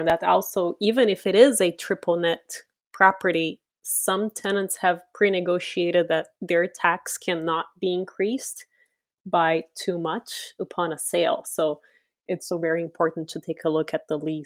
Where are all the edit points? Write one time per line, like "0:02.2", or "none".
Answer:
0:12.5

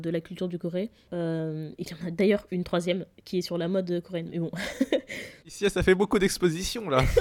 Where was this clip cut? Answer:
0:01.1

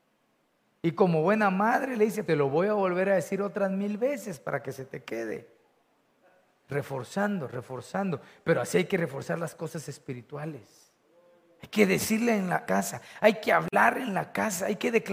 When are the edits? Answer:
0:02.2
0:12.6

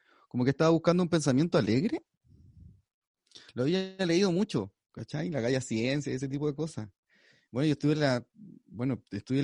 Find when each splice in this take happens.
none

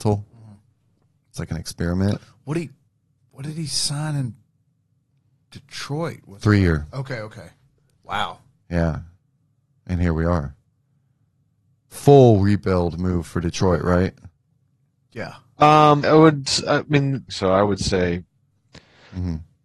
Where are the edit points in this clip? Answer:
0:16.0
0:17.3

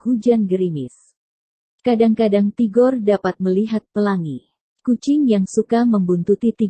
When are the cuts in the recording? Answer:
0:04.6

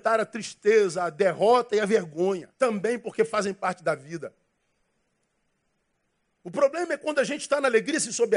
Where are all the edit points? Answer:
0:02.5

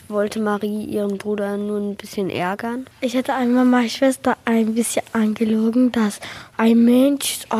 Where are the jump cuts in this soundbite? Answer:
0:02.9
0:06.5

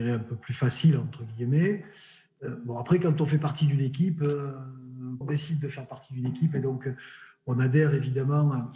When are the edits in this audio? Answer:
0:05.2

